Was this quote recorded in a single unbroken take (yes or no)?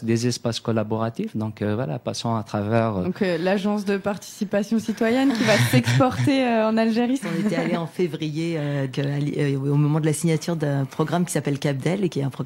no